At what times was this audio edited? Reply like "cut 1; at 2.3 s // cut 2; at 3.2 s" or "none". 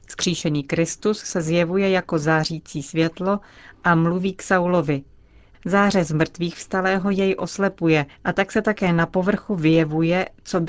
cut 1; at 5.5 s // cut 2; at 8.1 s